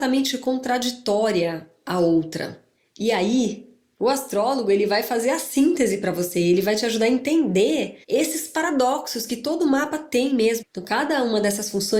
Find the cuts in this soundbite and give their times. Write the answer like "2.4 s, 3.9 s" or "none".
8.0 s, 10.6 s